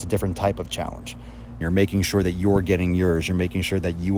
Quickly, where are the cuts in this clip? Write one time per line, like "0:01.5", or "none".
0:01.6